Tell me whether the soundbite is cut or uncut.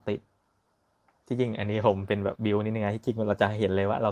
cut